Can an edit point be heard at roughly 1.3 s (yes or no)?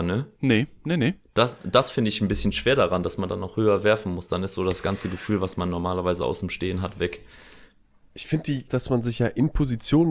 no